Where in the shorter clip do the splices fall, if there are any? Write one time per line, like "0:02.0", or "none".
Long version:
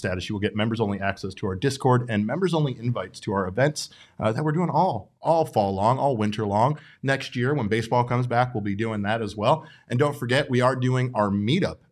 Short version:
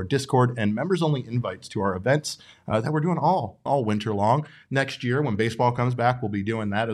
0:03.7